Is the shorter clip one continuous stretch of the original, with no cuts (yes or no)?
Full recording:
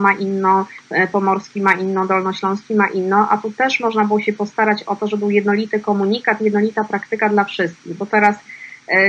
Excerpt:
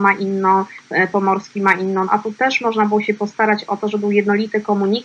no